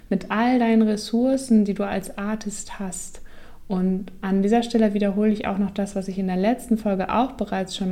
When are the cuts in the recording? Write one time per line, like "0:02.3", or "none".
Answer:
none